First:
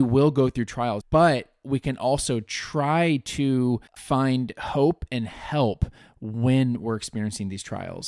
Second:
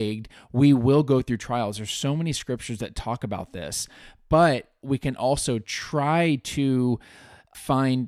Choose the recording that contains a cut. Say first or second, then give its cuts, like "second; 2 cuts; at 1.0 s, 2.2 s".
first; 2 cuts; at 1.0 s, 3.9 s